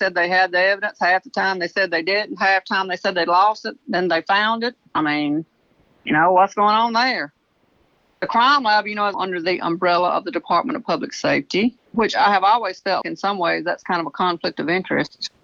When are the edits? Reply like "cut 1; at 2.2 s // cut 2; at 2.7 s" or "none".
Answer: cut 1; at 9.1 s // cut 2; at 11.9 s // cut 3; at 13.0 s